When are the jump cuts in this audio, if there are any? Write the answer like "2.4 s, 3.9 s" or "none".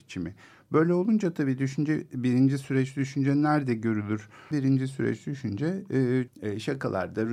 4.5 s, 6.3 s